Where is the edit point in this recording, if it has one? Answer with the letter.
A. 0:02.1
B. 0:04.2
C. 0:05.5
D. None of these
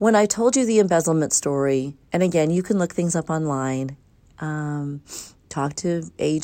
A